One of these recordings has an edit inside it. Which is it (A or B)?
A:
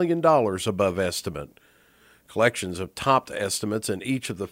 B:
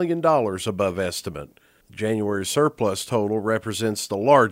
B